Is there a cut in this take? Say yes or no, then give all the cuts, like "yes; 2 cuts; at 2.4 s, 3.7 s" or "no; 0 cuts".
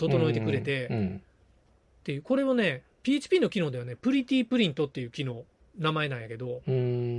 no; 0 cuts